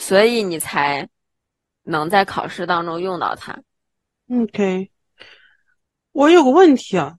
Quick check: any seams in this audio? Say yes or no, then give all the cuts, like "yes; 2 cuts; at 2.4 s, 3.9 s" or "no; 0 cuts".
no; 0 cuts